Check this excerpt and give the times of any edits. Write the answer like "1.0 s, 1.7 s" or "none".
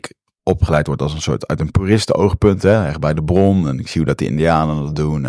none

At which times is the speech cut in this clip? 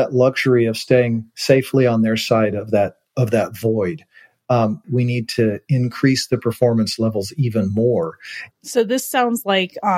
4.8 s, 8.5 s

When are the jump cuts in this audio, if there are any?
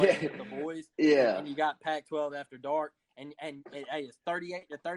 none

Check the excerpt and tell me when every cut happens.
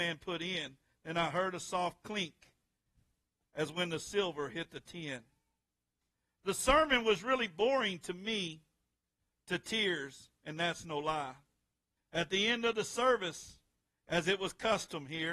12.0 s

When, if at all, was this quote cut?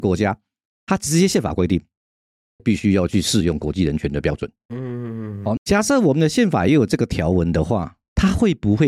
2.6 s, 5.6 s

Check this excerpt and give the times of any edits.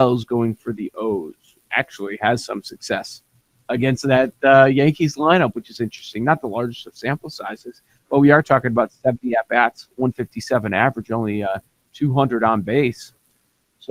none

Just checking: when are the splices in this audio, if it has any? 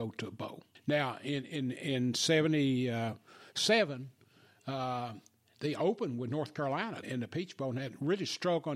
7.0 s

